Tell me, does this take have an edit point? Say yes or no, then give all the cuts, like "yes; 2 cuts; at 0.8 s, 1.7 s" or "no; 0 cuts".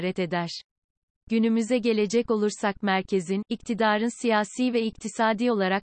no; 0 cuts